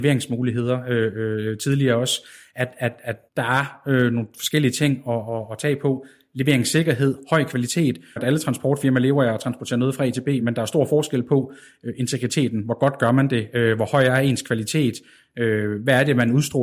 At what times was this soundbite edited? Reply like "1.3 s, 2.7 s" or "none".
3.3 s, 8.2 s, 10.4 s